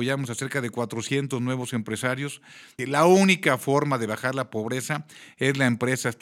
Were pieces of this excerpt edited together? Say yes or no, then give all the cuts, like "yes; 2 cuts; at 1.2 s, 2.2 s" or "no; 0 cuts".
yes; 1 cut; at 2.8 s